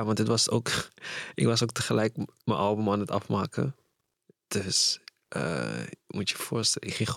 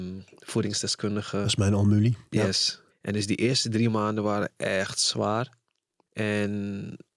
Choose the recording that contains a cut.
second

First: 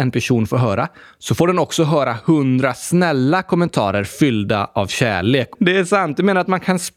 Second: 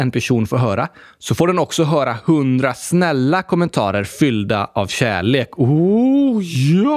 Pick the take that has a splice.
first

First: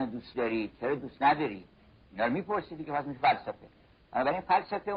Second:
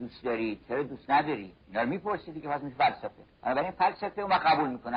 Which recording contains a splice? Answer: second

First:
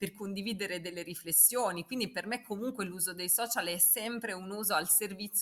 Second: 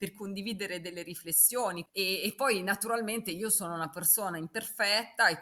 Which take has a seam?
second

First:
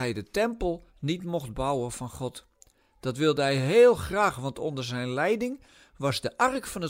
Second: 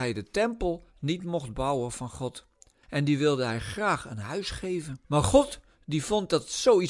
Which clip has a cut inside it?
second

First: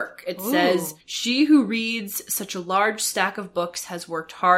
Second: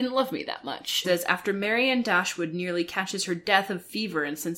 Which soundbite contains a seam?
second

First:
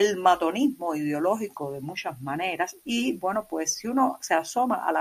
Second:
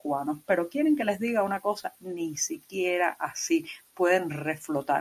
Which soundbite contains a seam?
first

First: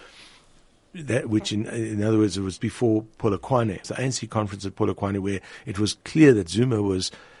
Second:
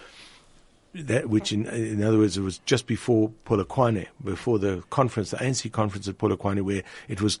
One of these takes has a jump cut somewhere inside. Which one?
first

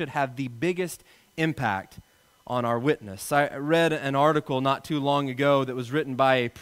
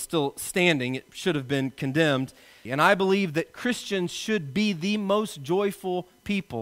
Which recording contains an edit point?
second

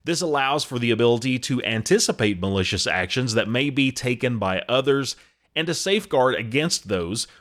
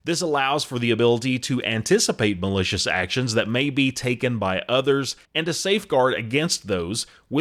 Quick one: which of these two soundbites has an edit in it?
second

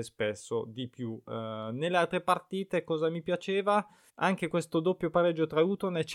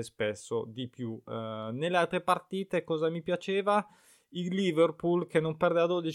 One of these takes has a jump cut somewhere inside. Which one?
first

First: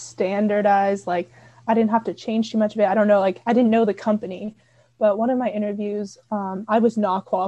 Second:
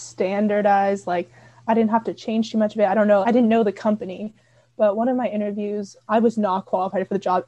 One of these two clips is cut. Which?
second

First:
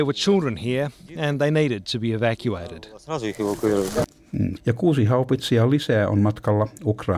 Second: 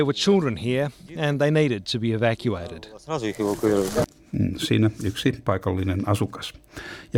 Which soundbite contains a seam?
first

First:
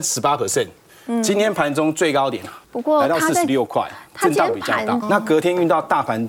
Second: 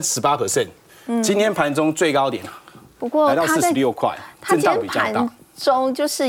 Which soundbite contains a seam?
first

